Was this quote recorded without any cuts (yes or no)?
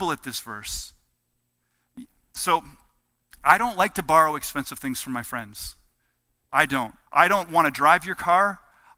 no